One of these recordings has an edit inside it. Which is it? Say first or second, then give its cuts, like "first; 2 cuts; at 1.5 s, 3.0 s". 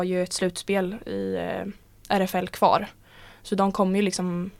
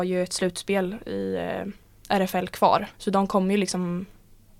second; 1 cut; at 2.9 s